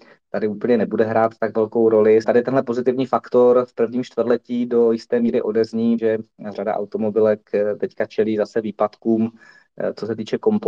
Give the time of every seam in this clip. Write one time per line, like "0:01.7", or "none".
0:02.2
0:06.0